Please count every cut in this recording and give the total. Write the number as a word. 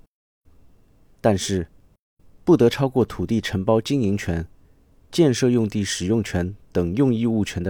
one